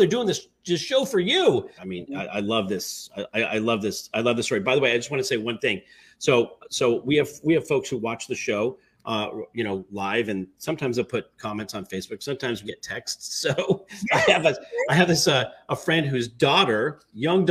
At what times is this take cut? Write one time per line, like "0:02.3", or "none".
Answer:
0:01.8
0:12.6

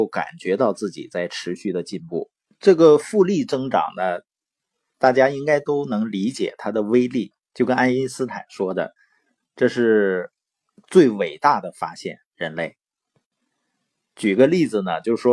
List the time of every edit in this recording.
0:02.5

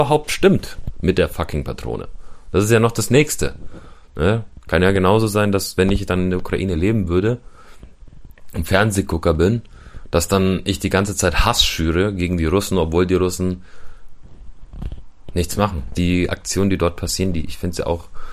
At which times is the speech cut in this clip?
0:15.9

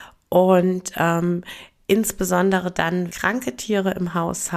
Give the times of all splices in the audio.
0:03.1

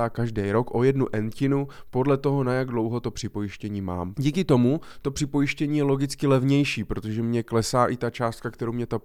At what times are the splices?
0:04.1

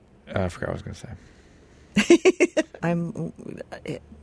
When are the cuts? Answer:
0:02.8

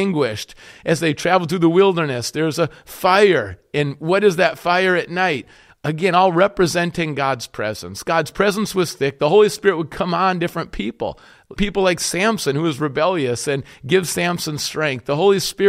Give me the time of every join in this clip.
0:11.6

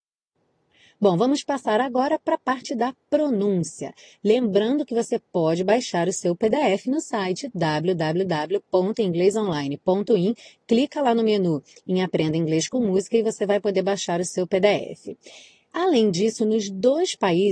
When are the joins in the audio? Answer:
0:15.7

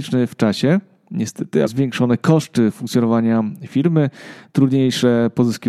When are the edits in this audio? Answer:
0:01.7

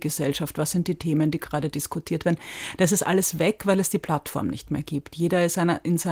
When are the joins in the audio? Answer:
none

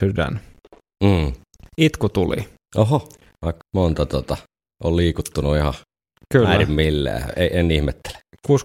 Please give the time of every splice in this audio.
0:03.6

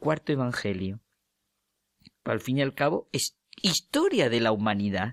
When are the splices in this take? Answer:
0:02.2

